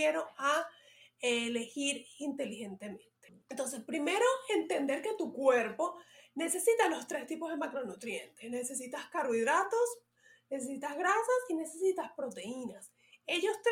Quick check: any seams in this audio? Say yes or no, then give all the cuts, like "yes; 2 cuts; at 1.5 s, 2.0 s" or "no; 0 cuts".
yes; 1 cut; at 3.4 s